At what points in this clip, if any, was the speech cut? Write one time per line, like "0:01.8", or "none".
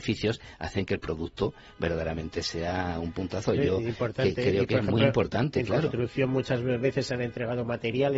none